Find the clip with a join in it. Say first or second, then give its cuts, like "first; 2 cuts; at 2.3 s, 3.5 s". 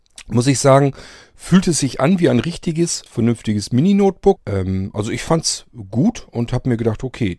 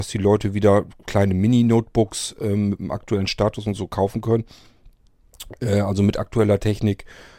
first; 2 cuts; at 3.1 s, 4.4 s